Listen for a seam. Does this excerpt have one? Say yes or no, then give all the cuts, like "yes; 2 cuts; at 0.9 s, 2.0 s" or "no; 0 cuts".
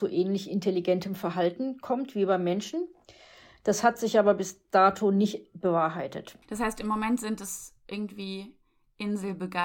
yes; 1 cut; at 6.4 s